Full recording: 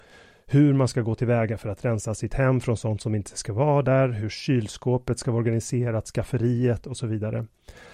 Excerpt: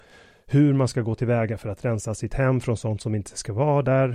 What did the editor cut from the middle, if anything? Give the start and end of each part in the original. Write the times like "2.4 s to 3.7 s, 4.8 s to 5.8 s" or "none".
none